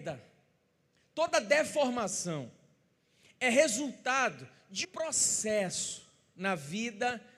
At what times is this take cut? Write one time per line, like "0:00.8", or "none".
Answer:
0:04.8